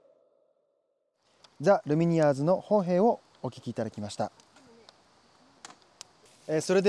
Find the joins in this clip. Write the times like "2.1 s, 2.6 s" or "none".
none